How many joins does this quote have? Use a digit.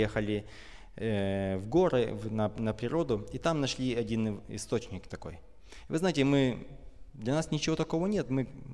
0